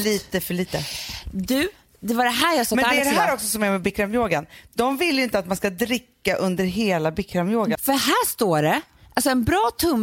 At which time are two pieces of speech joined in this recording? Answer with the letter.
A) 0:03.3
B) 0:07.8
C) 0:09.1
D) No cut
B